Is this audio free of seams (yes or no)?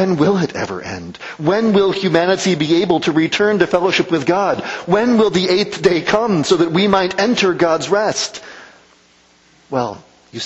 yes